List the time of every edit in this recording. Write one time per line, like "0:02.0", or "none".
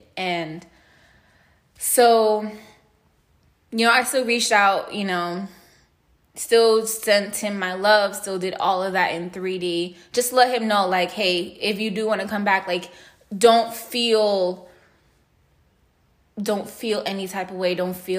none